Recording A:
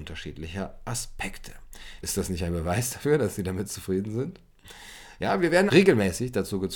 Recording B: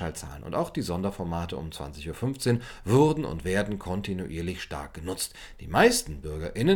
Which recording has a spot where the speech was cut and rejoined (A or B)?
A